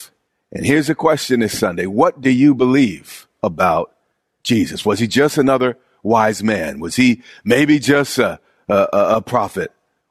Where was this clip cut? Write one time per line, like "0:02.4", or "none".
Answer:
none